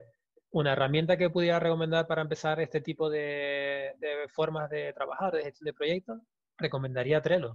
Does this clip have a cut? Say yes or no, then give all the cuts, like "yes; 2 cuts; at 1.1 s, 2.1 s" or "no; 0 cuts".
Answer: no; 0 cuts